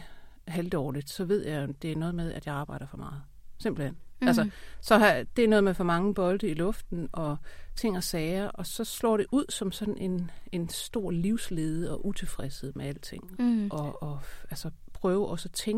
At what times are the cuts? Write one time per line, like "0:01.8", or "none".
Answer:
0:13.3